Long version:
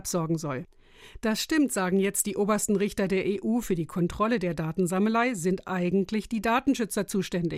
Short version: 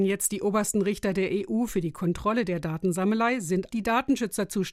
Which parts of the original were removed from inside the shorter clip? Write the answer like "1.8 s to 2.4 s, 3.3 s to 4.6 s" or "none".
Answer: 5.6 s to 6.3 s